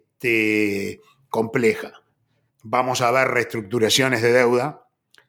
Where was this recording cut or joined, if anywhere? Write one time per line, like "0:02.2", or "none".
0:02.5